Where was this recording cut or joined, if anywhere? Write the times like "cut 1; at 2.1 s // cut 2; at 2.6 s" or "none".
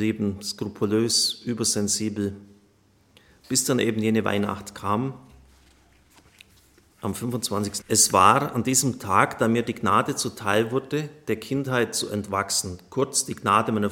cut 1; at 7.8 s